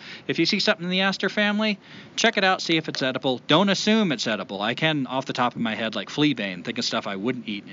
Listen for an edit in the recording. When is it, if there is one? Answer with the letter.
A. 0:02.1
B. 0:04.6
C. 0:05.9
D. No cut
D